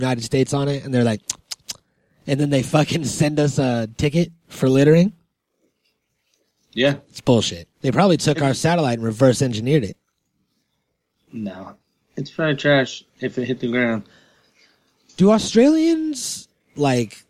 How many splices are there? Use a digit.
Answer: 1